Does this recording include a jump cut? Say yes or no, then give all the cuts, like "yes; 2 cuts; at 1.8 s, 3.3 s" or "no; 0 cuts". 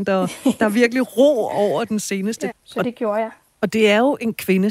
yes; 1 cut; at 2.5 s